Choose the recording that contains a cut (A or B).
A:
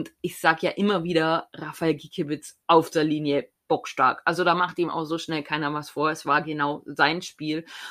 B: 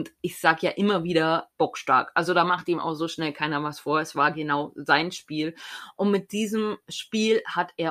B